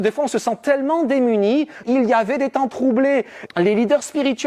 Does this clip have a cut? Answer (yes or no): yes